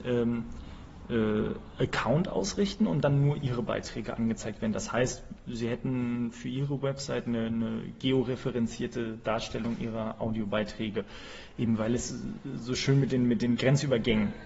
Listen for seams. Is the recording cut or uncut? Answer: uncut